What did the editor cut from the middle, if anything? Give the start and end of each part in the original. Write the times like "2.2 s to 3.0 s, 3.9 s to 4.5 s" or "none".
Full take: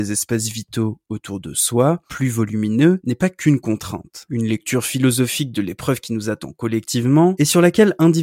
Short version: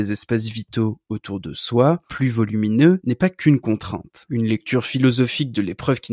none